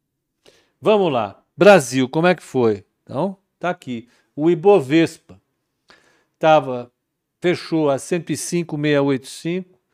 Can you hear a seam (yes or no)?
no